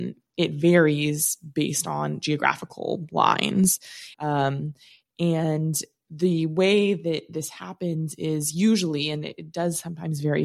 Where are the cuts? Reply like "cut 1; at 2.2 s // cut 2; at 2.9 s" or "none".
cut 1; at 4.1 s